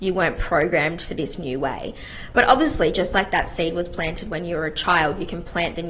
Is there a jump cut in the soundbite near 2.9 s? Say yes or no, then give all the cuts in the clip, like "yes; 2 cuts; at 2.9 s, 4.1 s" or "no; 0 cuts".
no; 0 cuts